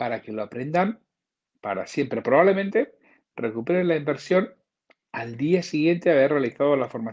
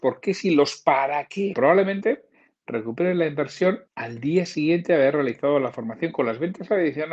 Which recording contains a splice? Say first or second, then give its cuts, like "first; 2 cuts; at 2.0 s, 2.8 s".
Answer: second; 2 cuts; at 1.5 s, 3.9 s